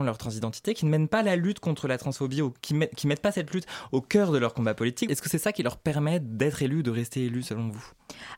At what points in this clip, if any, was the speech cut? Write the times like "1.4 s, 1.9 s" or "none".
5.1 s